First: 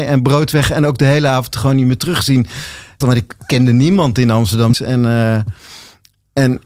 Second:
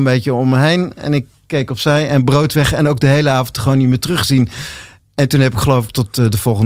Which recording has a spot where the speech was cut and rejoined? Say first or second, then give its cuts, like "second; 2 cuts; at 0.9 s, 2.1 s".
first; 2 cuts; at 3.0 s, 4.7 s